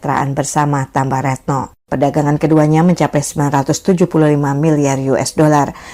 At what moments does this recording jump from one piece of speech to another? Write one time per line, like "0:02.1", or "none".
0:01.8